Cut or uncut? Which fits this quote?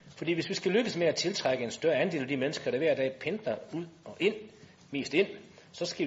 uncut